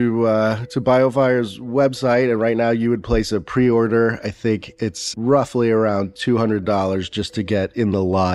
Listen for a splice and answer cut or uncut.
uncut